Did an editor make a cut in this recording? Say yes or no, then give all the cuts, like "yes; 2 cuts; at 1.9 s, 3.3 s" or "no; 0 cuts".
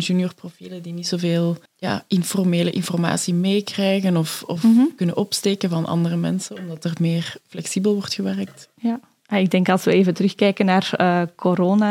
yes; 1 cut; at 1.7 s